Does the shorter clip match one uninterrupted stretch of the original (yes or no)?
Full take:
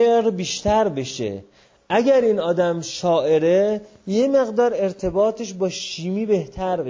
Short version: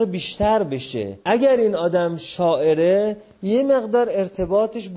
no